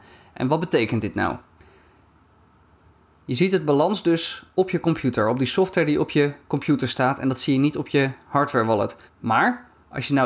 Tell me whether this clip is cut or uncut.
cut